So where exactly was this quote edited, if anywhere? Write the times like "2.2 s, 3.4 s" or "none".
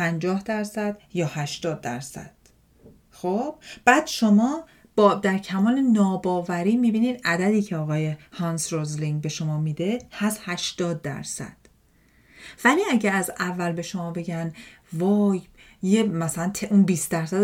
none